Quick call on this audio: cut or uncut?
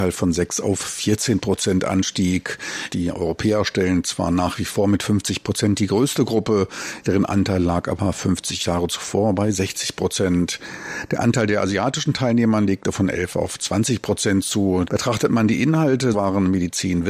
cut